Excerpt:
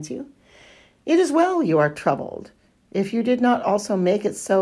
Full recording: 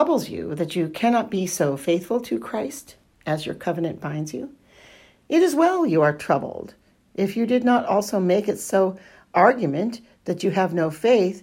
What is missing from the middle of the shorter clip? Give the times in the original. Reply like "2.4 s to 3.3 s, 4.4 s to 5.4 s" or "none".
none